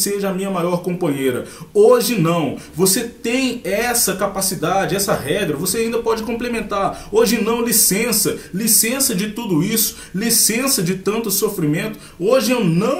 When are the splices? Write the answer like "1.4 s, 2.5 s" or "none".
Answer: none